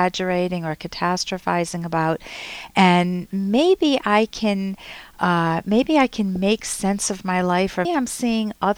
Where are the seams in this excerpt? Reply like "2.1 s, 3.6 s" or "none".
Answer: 7.8 s